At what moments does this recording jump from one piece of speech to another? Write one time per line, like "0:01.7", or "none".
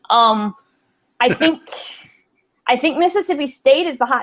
none